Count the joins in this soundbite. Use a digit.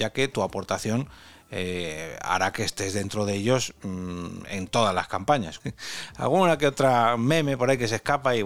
1